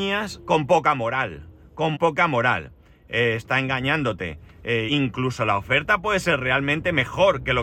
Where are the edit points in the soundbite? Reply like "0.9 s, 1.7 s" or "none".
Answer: 1.9 s, 4.9 s